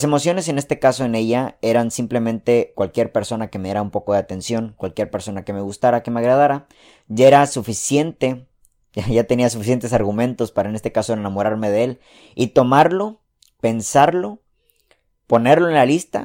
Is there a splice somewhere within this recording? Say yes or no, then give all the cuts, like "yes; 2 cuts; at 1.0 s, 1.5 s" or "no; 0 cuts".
yes; 1 cut; at 2.7 s